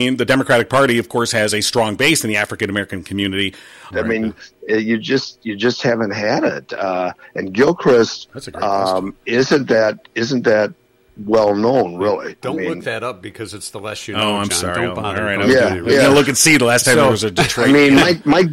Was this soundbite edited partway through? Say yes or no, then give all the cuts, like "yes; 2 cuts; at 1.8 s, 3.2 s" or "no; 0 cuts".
yes; 1 cut; at 3.9 s